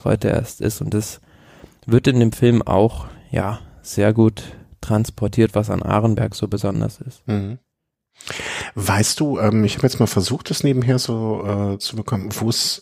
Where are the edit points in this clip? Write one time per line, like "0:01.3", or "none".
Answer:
none